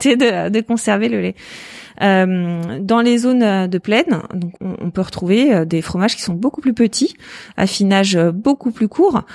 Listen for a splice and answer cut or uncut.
cut